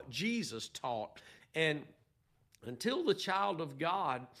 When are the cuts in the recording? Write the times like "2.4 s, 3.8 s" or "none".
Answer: 1.4 s